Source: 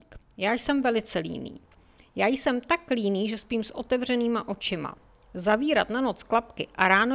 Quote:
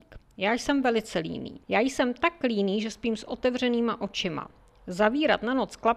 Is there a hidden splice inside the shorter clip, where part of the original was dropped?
yes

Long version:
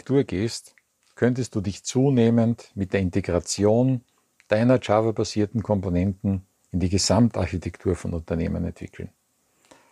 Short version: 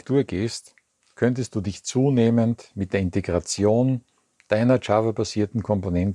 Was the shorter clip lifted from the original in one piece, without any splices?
yes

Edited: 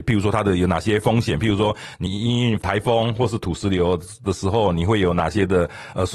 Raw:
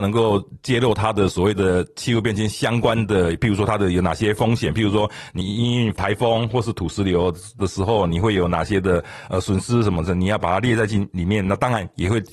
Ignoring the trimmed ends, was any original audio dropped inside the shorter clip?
no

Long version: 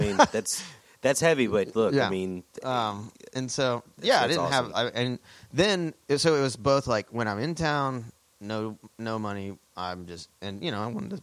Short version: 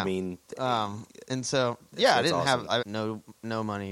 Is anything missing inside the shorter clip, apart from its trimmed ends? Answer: yes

